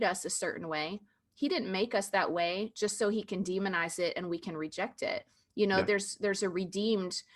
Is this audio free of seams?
yes; 0 cuts

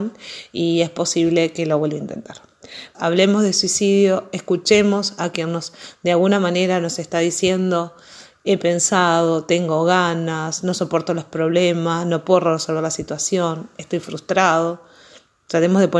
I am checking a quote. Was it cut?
yes; 1 cut; at 2.9 s

